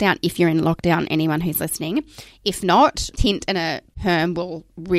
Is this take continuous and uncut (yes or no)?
no